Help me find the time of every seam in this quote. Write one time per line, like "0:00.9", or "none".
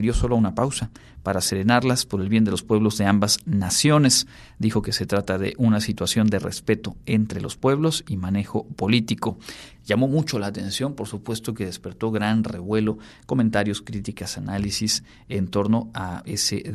0:04.6
0:09.7